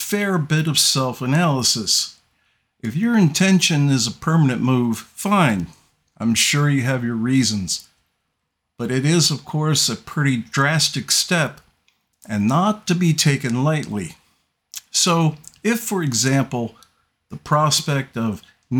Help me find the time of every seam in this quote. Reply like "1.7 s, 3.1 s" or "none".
none